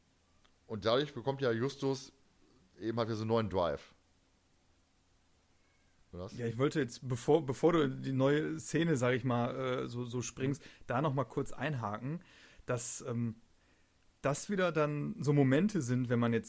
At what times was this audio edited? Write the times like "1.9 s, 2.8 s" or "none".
none